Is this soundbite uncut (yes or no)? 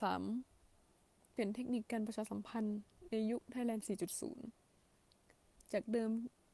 no